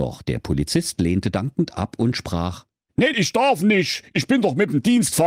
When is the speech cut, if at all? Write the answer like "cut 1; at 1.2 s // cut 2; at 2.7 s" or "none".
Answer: cut 1; at 3.1 s